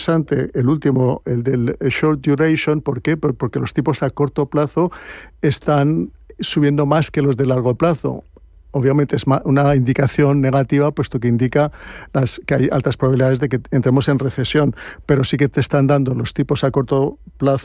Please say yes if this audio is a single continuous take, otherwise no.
yes